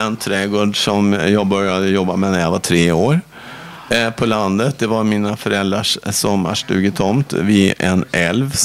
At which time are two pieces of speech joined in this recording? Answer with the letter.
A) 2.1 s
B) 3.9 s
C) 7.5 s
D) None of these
D